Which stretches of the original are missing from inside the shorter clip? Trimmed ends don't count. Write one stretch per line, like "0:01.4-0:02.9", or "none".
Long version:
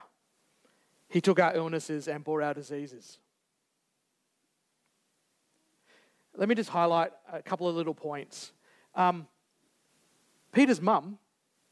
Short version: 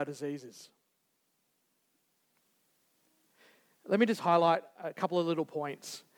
none